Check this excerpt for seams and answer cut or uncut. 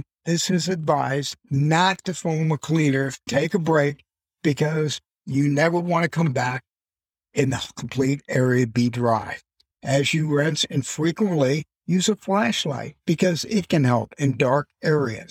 cut